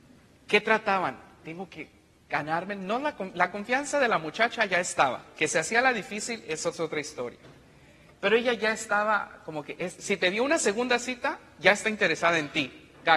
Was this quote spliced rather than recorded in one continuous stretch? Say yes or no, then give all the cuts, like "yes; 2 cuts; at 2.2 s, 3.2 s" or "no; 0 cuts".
yes; 1 cut; at 10.0 s